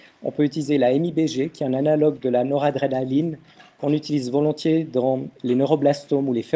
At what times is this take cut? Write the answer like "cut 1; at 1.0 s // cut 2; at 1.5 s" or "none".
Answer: none

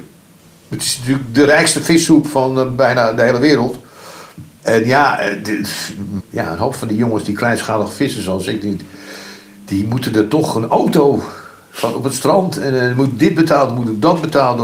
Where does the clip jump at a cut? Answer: cut 1; at 4.6 s // cut 2; at 6.2 s

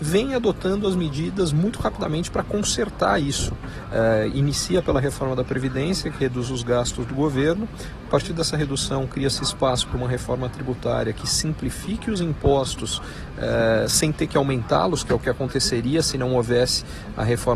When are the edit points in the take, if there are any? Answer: none

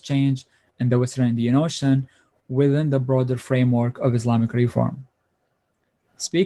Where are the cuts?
none

